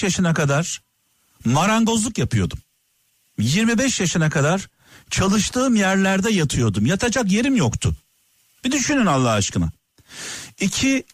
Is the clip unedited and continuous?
yes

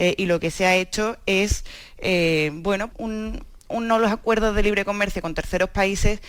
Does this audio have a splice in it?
yes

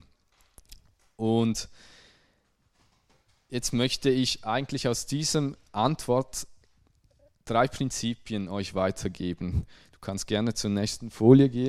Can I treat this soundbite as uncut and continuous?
yes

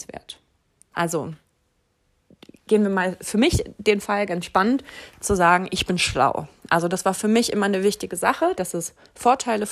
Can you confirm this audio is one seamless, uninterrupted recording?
no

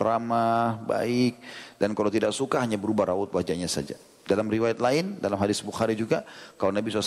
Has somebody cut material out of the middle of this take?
no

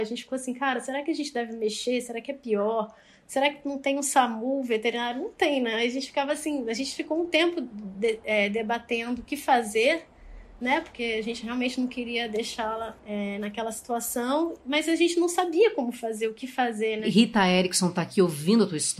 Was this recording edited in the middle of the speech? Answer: yes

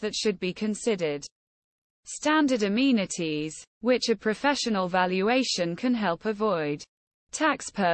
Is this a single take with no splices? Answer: yes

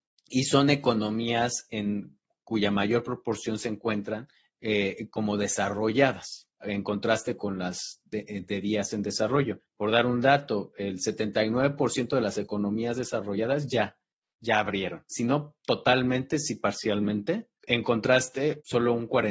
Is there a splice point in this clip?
no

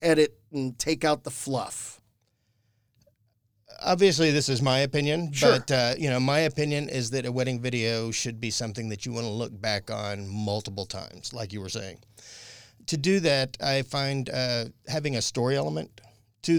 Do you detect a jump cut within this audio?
no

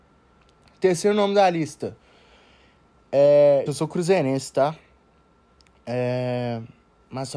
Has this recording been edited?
yes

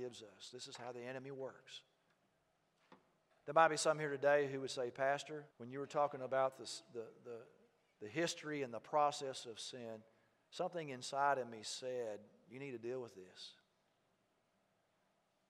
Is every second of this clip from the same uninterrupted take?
no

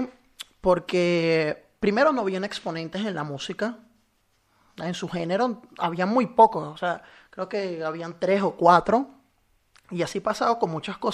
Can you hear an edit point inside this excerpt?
yes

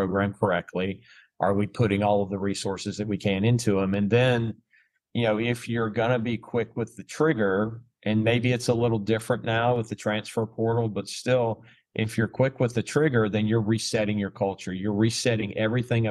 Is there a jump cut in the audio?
no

